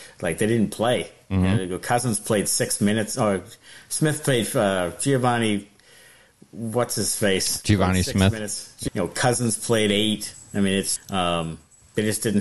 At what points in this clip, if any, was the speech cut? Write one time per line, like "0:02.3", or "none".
0:08.9
0:11.0